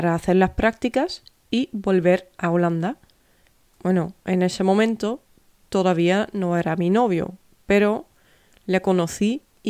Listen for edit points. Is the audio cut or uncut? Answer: cut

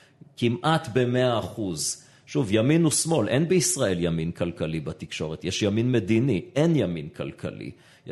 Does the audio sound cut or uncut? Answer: uncut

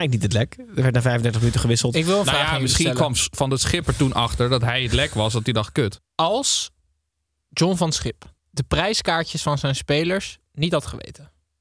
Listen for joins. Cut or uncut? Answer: cut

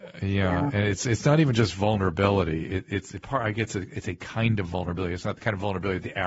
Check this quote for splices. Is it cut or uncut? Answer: uncut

